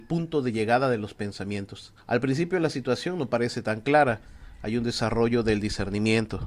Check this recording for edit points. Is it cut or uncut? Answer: cut